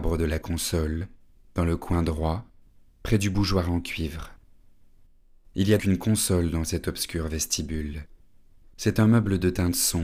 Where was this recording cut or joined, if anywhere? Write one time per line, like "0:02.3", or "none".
0:05.8